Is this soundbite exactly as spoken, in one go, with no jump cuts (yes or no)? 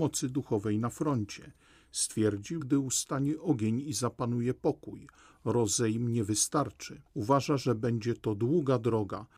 no